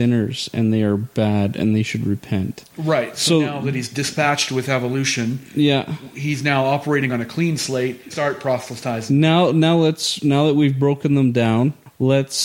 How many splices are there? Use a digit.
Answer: 1